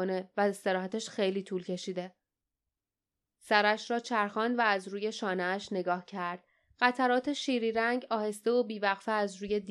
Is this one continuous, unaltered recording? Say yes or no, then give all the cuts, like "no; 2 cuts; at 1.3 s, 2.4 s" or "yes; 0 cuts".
yes; 0 cuts